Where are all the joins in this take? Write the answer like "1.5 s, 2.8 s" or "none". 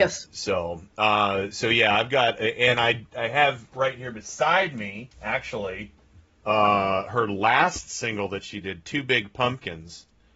5.1 s